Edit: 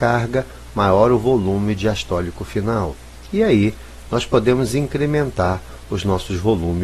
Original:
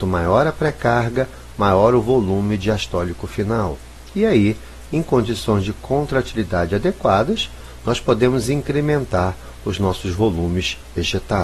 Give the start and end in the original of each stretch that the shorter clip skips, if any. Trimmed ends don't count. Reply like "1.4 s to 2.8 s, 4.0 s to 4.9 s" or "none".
4.9 s to 7.8 s